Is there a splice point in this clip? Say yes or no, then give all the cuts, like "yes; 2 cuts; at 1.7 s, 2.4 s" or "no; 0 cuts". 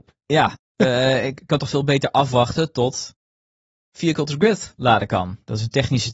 no; 0 cuts